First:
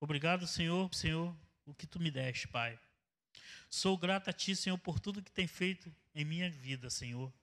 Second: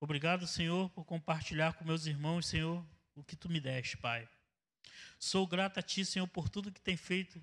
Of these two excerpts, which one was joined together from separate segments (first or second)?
first